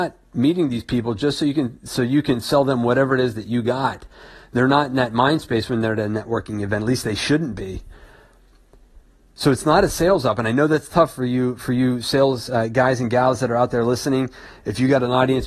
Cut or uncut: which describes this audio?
uncut